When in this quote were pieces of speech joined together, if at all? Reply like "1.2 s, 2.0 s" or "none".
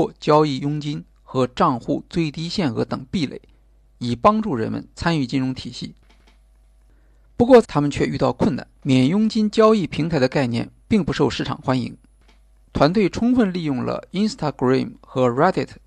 7.6 s, 8.7 s, 12.6 s